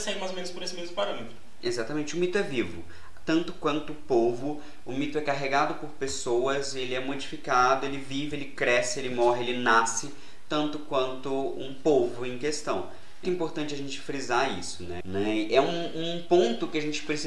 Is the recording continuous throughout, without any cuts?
no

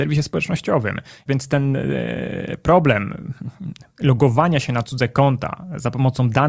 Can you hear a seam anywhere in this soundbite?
yes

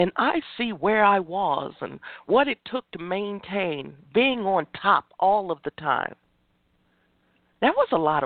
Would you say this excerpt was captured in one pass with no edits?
yes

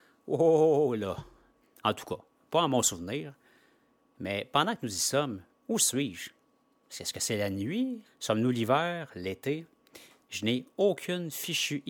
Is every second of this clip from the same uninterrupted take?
no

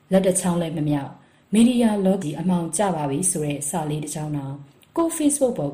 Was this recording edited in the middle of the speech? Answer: yes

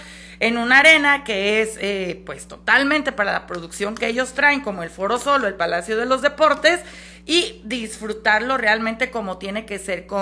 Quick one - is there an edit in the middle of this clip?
no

